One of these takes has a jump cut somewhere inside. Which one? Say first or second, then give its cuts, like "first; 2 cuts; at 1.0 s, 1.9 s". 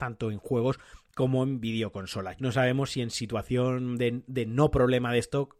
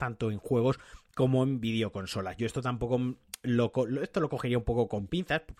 first; 1 cut; at 2.4 s